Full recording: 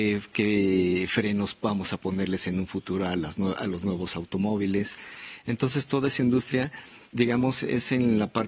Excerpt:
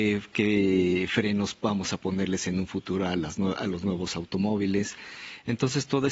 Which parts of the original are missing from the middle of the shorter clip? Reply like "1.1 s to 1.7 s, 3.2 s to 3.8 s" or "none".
none